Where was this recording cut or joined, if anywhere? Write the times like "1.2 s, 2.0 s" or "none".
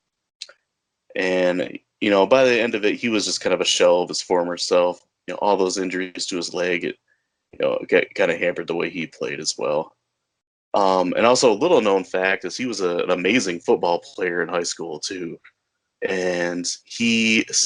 none